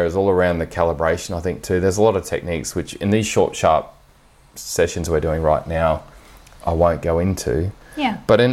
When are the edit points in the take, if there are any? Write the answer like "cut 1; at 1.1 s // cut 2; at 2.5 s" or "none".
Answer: none